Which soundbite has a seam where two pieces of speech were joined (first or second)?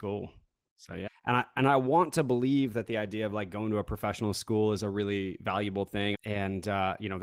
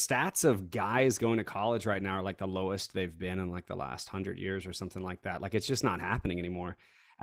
first